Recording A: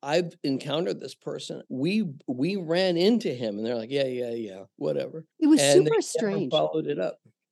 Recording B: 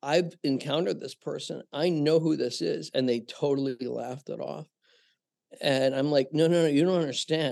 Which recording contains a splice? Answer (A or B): A